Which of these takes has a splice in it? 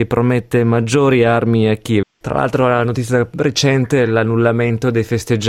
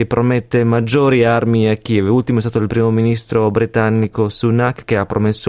first; 1 cut; at 2.0 s

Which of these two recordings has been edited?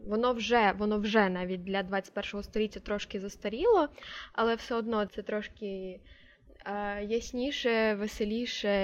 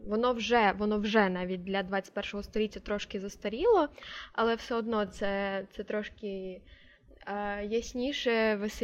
first; 1 cut; at 5.1 s

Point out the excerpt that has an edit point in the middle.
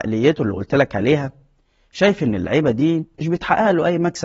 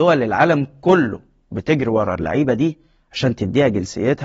first; 1 cut; at 3.1 s

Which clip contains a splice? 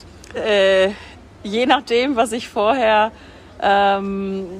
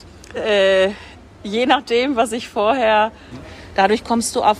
second; 1 cut; at 3.3 s

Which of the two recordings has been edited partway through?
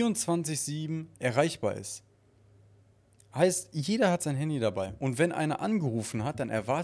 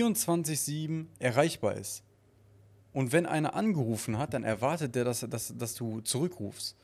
second; 1 cut; at 2.9 s

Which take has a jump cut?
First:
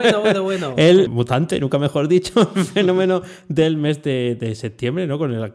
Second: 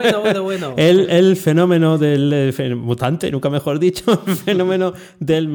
first; 1 cut; at 1.1 s

